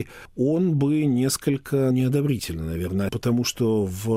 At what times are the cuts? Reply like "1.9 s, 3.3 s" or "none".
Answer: 1.9 s, 3.1 s